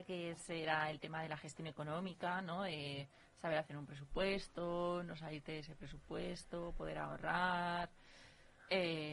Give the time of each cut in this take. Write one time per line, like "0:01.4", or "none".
none